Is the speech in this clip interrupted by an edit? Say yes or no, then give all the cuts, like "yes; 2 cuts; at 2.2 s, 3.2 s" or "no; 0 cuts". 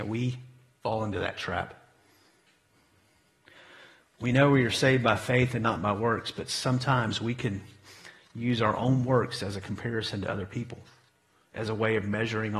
no; 0 cuts